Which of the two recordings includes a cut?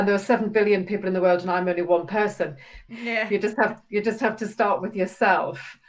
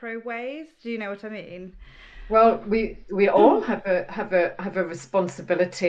first; 1 cut; at 2.9 s

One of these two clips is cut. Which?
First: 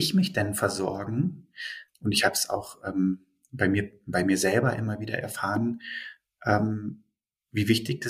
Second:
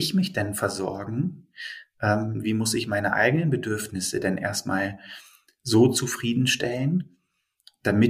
first; 1 cut; at 1.9 s

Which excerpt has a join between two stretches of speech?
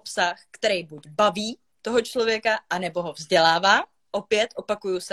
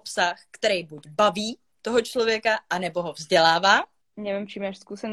second; 1 cut; at 4.0 s

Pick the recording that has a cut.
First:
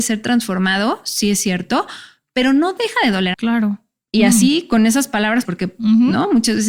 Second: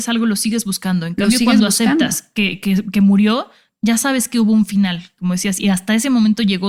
first; 2 cuts; at 3.3 s, 5.4 s

